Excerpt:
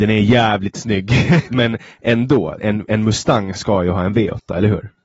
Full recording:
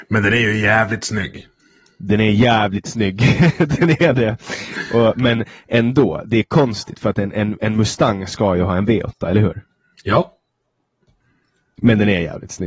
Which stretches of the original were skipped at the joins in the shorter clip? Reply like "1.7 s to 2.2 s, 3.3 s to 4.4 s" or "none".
3.6 s to 5.1 s, 6.2 s to 7.3 s